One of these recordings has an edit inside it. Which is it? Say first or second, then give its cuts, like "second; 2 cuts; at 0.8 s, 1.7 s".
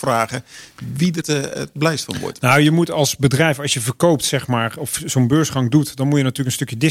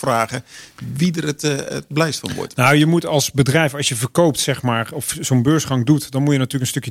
first; 1 cut; at 1.2 s